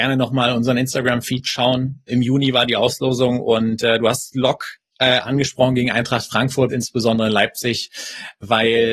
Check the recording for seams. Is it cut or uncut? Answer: cut